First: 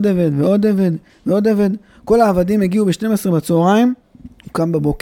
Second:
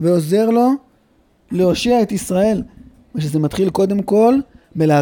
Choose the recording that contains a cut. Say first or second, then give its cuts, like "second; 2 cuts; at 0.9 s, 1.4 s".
first; 1 cut; at 4.0 s